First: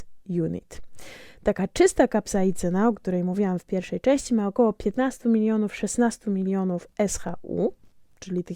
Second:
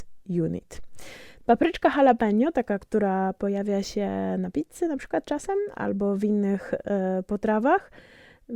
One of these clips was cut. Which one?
second; 1 cut; at 1.4 s

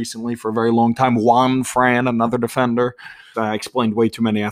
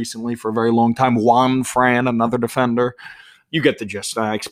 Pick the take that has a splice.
first; 1 cut; at 3.3 s

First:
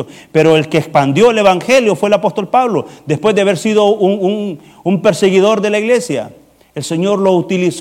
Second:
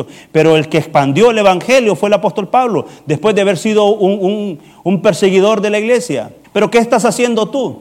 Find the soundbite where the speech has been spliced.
second; 1 cut; at 6.4 s

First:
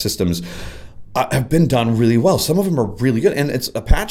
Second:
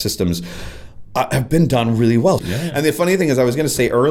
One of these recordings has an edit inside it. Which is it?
second; 1 cut; at 2.4 s

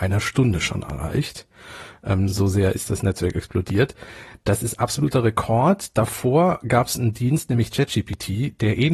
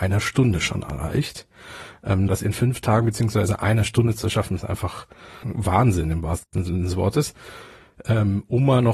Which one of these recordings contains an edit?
second; 2 cuts; at 2.3 s, 5.4 s

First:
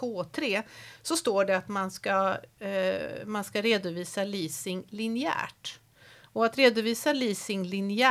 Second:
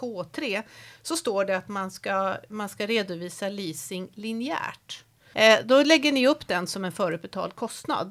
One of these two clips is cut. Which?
second; 2 cuts; at 2.5 s, 5.3 s

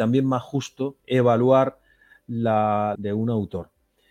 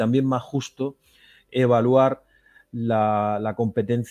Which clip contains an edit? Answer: first; 2 cuts; at 1.0 s, 2.9 s

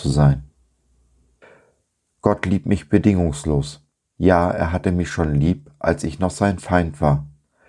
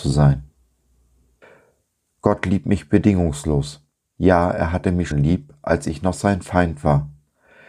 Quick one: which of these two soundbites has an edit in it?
second; 1 cut; at 5.1 s

